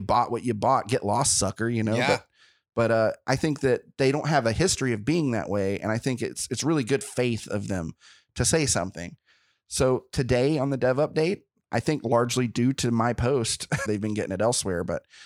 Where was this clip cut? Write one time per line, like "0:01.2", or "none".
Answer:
0:13.9